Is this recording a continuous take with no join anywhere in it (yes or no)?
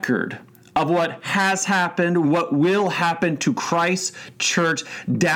no